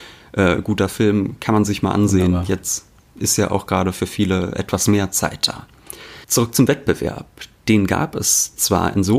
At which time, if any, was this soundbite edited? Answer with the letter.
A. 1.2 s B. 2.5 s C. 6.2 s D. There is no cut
C